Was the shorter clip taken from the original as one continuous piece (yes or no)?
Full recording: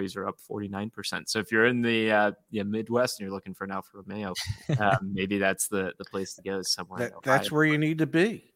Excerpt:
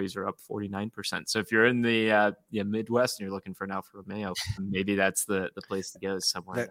no